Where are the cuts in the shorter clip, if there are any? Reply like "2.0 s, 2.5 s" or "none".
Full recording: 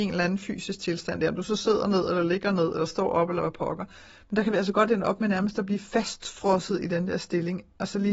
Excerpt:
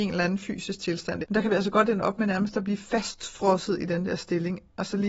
1.2 s